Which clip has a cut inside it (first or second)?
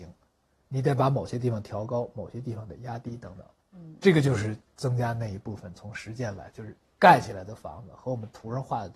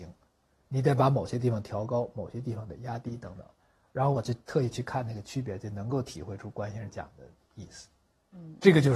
first